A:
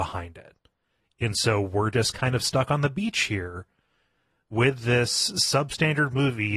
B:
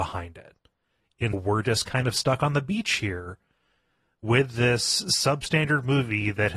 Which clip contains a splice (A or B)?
B